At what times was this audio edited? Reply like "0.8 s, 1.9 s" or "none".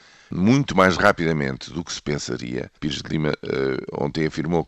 2.8 s